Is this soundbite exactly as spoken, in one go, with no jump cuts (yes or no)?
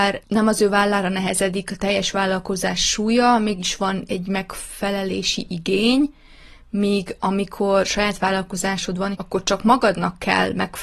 no